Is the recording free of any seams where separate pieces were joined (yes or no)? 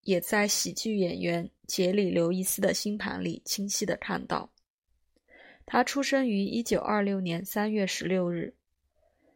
yes